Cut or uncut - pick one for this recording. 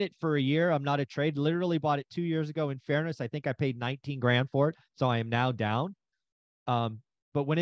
uncut